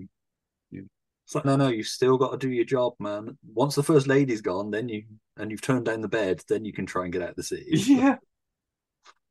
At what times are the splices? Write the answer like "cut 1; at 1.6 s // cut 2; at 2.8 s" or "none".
cut 1; at 1.4 s